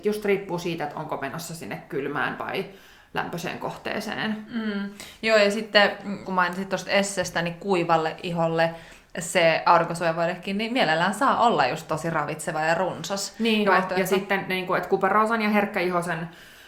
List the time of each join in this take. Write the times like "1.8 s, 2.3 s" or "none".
6.2 s, 13.6 s